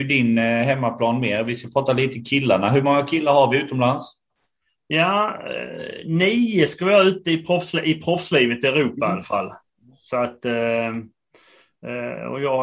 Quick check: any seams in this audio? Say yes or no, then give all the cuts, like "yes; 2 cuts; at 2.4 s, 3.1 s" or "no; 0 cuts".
no; 0 cuts